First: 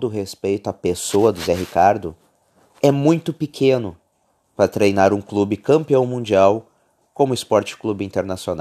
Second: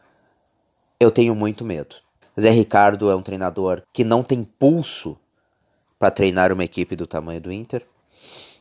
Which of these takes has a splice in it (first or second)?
second